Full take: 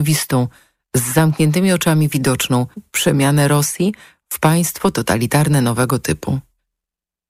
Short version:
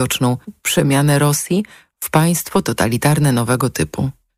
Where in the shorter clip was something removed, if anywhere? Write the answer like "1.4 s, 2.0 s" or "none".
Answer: none